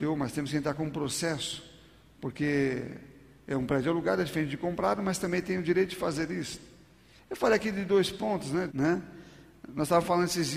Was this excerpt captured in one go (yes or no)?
no